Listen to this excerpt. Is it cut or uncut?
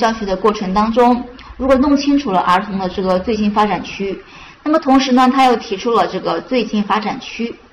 cut